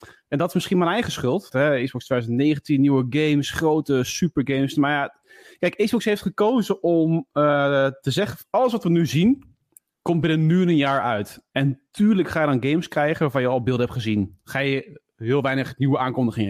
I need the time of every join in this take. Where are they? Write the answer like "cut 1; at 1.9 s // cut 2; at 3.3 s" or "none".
cut 1; at 1.5 s // cut 2; at 8.4 s

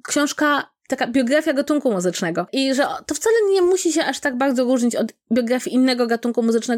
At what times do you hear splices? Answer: none

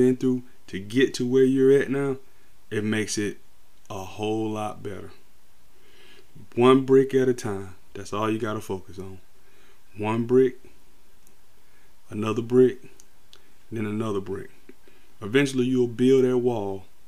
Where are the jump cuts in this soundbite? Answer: none

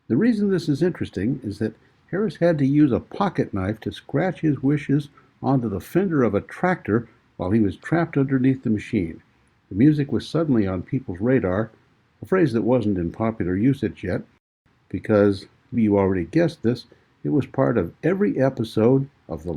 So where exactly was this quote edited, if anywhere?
cut 1; at 9.6 s // cut 2; at 15.7 s

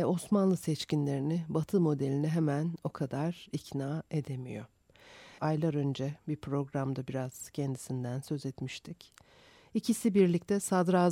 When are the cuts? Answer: cut 1; at 5.4 s

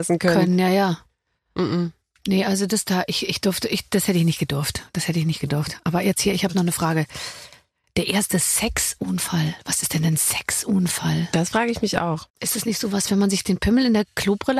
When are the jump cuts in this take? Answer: cut 1; at 12.3 s

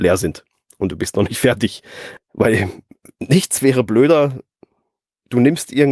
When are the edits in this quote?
cut 1; at 2.2 s

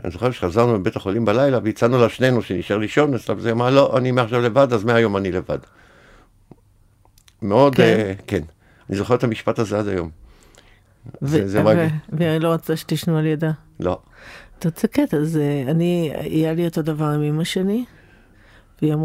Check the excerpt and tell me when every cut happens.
none

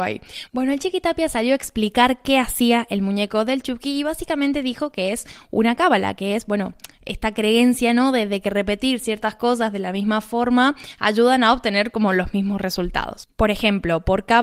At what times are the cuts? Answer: none

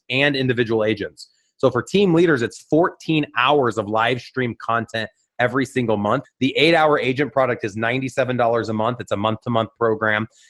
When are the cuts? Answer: cut 1; at 6.2 s

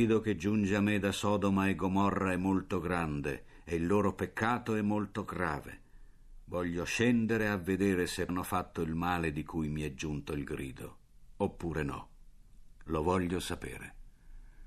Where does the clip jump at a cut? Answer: cut 1; at 8.3 s

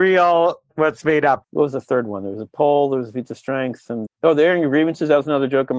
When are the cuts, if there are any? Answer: cut 1; at 1.4 s // cut 2; at 4.1 s

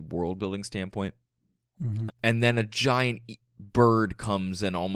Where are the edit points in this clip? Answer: cut 1; at 2.1 s // cut 2; at 3.4 s

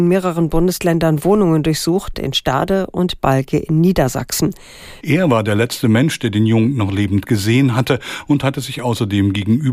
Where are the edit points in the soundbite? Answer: cut 1; at 2.1 s // cut 2; at 5.0 s

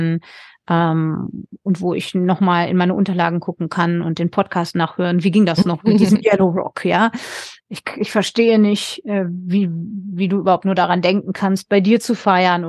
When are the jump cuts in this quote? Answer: cut 1; at 7.6 s

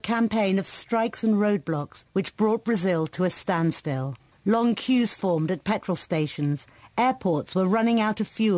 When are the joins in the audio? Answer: none

